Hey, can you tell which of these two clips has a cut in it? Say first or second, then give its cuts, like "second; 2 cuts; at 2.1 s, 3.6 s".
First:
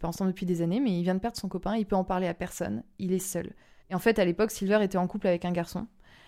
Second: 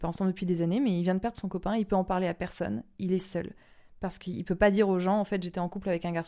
first; 1 cut; at 3.8 s